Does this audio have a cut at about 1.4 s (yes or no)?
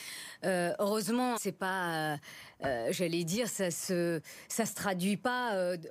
yes